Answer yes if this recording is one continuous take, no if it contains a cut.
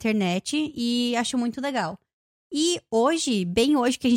yes